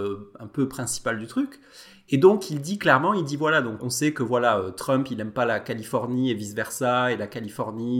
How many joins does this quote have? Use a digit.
1